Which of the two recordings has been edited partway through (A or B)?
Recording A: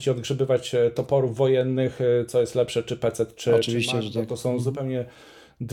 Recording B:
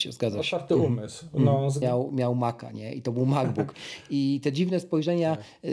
B